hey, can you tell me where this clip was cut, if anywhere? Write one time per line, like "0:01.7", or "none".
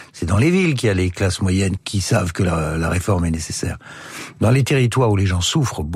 0:01.8